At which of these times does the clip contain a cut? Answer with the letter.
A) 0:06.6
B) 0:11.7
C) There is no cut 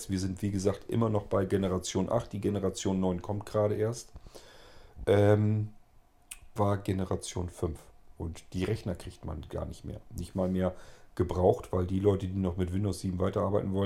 A